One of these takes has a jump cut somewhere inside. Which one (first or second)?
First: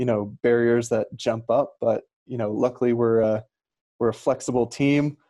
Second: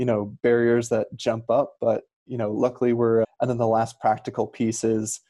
second